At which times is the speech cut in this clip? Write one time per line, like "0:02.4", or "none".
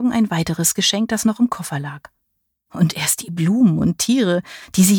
0:02.6